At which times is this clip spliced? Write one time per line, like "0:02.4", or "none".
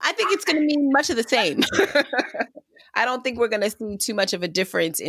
none